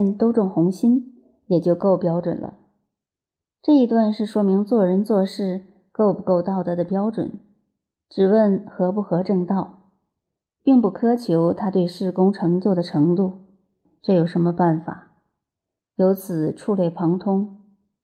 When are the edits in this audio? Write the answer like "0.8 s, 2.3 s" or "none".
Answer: 13.8 s